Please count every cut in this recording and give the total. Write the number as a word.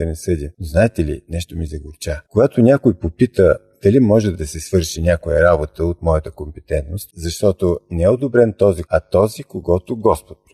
two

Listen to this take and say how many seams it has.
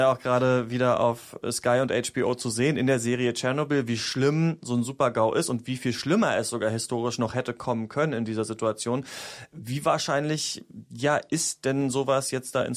zero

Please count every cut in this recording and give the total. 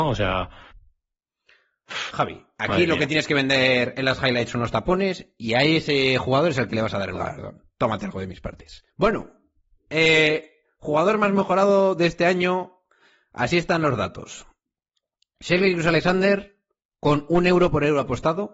one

